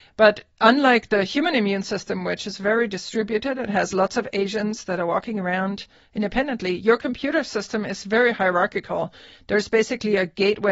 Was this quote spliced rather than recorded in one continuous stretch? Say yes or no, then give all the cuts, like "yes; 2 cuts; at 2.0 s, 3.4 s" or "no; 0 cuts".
no; 0 cuts